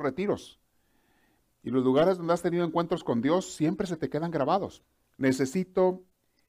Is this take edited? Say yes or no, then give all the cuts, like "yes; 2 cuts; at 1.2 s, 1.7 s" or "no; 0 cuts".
yes; 1 cut; at 5.0 s